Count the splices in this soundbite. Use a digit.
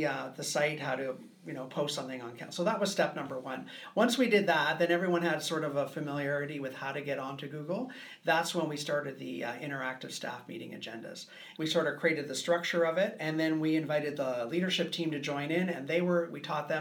1